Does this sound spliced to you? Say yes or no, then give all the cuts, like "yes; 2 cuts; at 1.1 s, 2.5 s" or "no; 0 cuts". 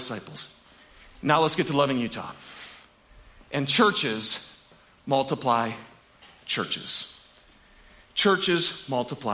no; 0 cuts